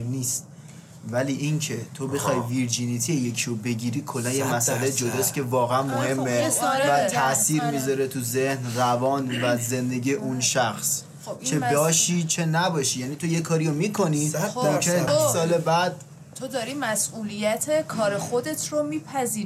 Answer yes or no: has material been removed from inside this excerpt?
yes